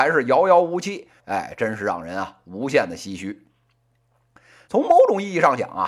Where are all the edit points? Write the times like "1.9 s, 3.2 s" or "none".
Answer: 1.2 s, 4.7 s